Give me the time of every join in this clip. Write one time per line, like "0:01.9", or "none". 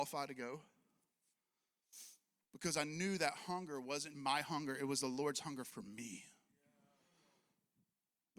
0:02.4
0:04.1